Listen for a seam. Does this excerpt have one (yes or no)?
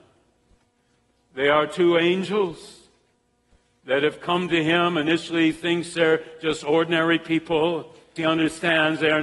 yes